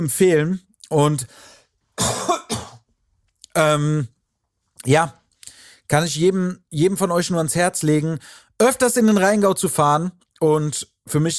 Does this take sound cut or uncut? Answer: uncut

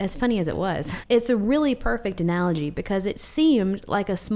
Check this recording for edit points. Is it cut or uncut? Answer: cut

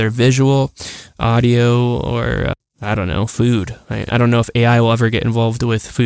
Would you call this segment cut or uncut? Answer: cut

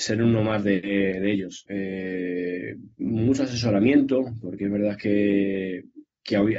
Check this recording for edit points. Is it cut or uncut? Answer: cut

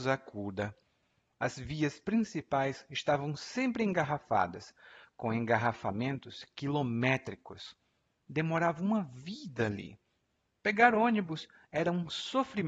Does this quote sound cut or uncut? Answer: uncut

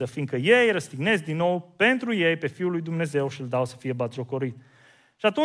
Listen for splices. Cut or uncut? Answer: uncut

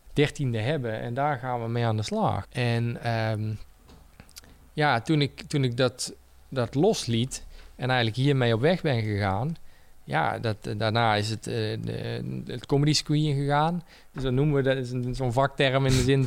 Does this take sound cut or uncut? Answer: cut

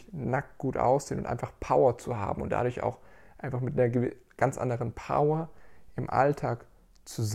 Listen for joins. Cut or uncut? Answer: uncut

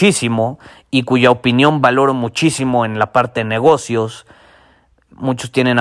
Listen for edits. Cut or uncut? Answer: uncut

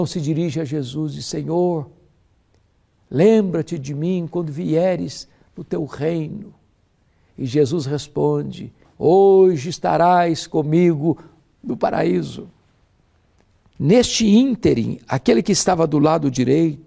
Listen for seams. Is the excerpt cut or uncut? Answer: cut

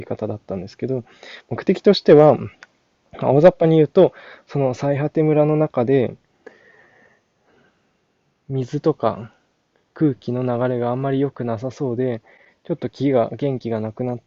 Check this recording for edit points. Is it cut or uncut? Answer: uncut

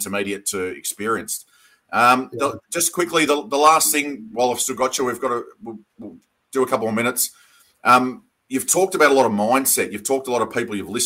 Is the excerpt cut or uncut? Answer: uncut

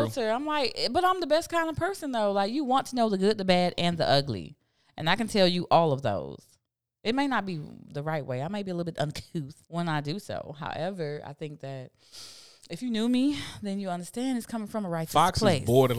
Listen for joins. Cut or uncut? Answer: cut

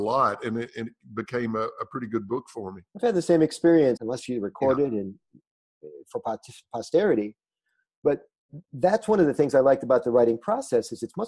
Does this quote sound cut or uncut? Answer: cut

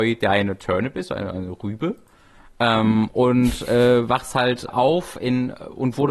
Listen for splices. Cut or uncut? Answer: cut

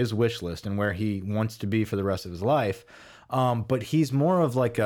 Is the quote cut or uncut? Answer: uncut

